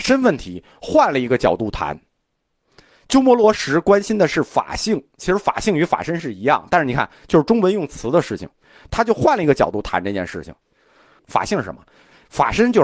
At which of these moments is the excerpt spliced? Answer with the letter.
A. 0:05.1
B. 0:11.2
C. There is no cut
B